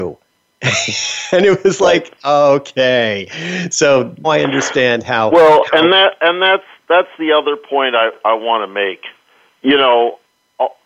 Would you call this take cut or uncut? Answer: cut